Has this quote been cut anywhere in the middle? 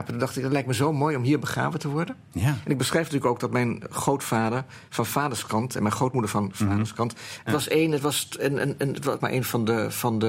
yes; 2 cuts; at 7.5 s, 9.2 s

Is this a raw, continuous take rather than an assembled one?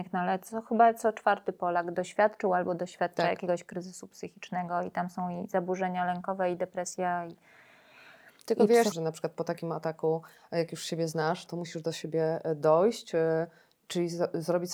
no; 2 cuts; at 8.9 s, 11.5 s

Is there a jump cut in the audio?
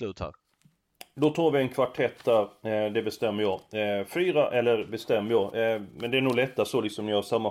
no; 0 cuts

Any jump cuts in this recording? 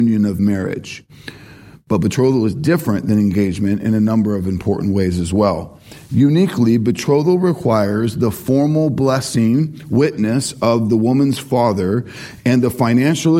no; 0 cuts

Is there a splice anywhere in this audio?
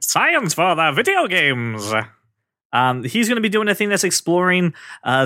no; 0 cuts

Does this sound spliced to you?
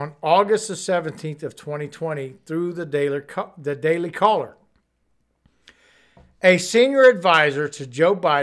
no; 0 cuts

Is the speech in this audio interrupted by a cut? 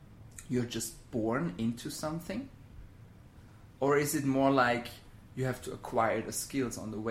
no; 0 cuts

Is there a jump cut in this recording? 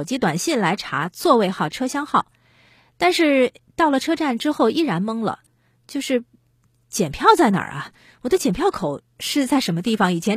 no; 0 cuts

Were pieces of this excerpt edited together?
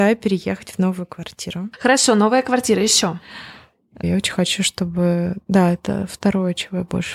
yes; 1 cut; at 4.0 s

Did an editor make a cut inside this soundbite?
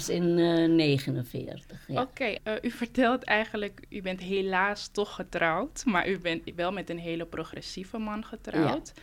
yes; 2 cuts; at 2.4 s, 3.8 s

